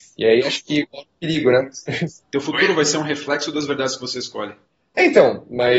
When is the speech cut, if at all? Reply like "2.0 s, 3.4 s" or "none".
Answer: none